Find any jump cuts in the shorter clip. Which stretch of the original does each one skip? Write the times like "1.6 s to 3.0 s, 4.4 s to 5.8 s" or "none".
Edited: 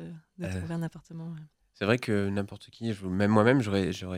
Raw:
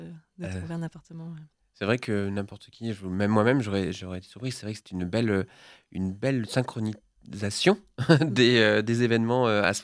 none